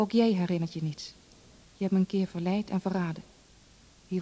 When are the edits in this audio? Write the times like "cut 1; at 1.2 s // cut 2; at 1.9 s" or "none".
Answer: cut 1; at 1.6 s

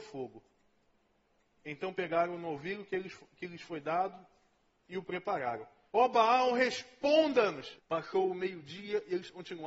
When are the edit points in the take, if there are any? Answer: cut 1; at 5.9 s // cut 2; at 7.8 s

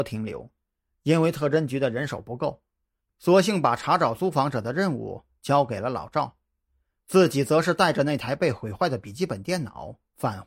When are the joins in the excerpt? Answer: none

